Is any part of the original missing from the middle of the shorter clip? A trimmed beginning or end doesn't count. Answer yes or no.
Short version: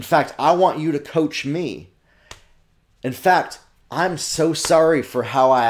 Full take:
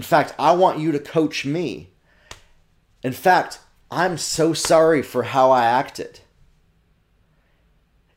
no